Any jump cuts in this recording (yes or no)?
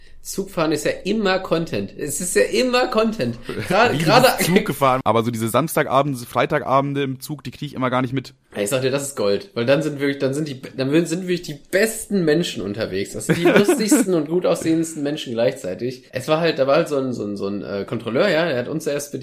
yes